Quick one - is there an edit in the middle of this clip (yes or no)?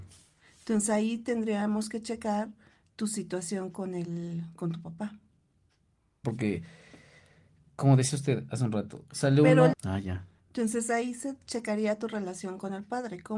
yes